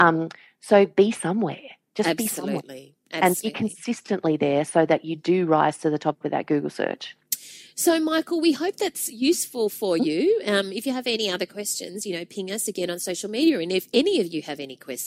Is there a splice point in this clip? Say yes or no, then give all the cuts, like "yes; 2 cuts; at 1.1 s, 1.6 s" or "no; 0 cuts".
no; 0 cuts